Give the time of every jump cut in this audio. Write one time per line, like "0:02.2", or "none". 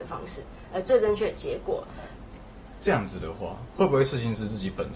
0:02.2